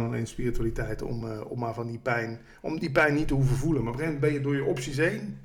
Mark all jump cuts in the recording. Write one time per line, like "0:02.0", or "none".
none